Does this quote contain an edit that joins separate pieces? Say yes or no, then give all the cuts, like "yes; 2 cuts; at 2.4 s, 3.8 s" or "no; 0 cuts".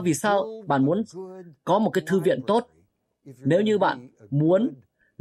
no; 0 cuts